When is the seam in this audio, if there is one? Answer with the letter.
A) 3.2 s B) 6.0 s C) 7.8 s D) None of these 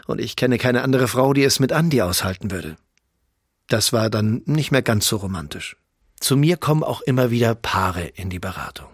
B